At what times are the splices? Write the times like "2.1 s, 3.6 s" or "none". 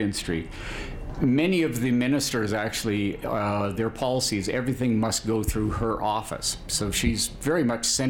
none